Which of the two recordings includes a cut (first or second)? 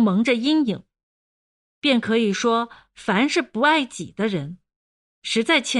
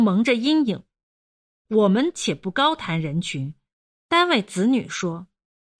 first